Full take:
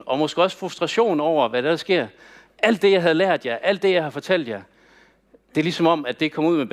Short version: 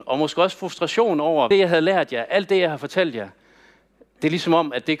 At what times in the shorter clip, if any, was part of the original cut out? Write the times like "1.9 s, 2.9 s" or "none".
1.5 s